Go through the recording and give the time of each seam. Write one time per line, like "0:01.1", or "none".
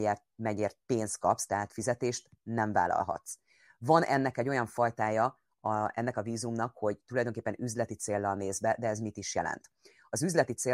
none